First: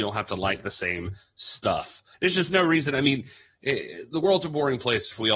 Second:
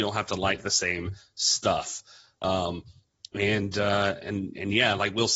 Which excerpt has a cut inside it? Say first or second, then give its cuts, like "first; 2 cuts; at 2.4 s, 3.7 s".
first; 1 cut; at 2.1 s